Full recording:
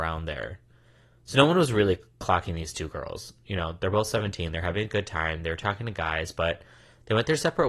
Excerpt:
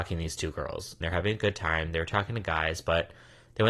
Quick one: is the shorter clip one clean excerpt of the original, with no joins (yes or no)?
no